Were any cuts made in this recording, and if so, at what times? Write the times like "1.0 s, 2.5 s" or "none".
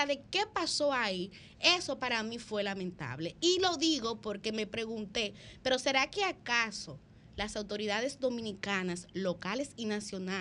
none